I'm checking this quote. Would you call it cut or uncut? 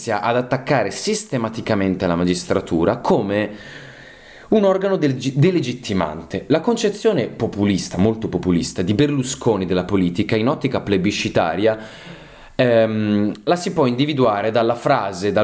uncut